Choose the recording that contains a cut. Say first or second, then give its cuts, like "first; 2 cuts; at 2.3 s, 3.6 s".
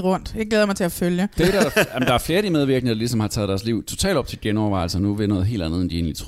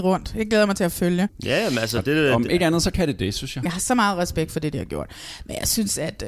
second; 1 cut; at 1.3 s